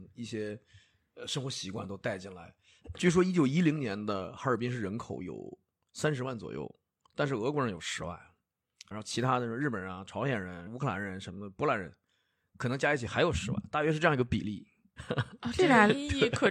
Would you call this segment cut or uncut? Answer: cut